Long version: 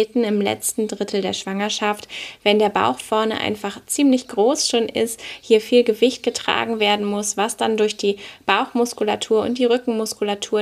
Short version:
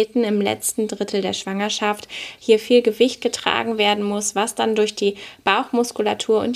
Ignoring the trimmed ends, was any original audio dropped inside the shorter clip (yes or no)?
yes